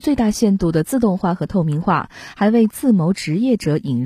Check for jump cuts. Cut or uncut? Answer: uncut